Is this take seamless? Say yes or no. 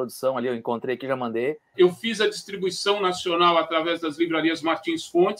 no